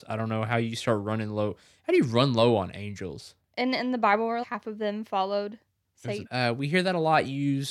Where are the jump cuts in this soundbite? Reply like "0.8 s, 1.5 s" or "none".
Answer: 4.4 s, 6.3 s